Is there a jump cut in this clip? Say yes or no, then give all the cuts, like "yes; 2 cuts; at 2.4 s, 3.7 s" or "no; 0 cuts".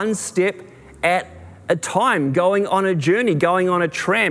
no; 0 cuts